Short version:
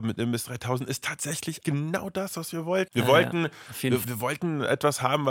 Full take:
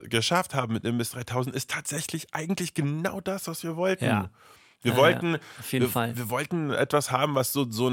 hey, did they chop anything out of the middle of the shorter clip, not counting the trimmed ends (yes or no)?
yes